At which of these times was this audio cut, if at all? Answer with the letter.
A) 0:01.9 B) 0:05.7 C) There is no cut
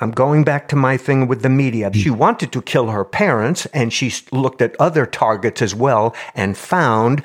A